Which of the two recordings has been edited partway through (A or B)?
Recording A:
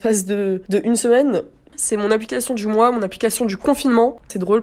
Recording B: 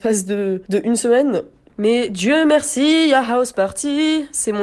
A